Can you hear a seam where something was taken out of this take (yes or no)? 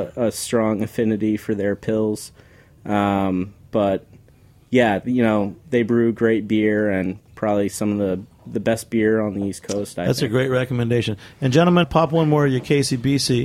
yes